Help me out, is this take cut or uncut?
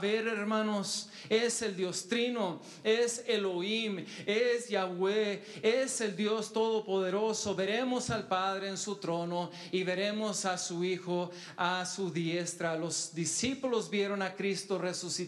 uncut